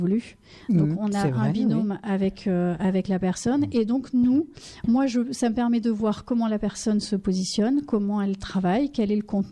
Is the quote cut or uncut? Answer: uncut